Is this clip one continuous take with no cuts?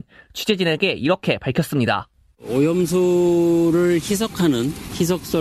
yes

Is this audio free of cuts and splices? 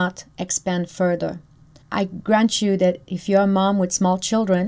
no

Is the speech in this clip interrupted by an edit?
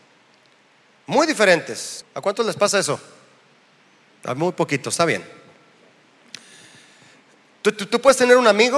yes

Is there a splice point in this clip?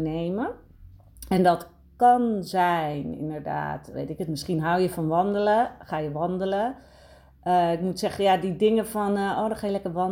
yes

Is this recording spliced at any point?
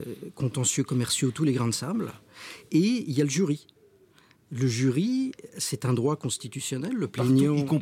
no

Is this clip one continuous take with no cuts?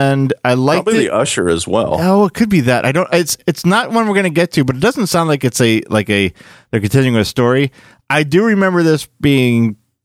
yes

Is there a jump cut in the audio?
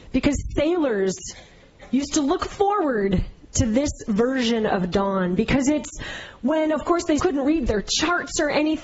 yes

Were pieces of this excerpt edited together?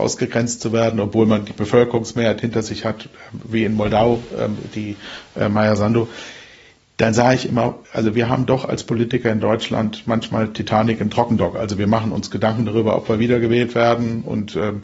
yes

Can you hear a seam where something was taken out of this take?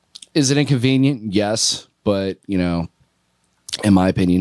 no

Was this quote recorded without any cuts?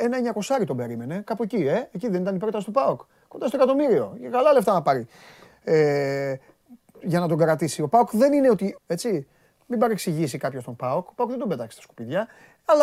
no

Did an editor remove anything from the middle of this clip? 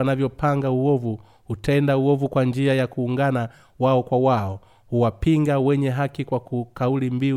no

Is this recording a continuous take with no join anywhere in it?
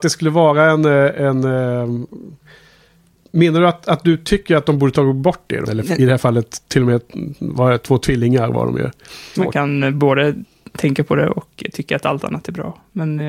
no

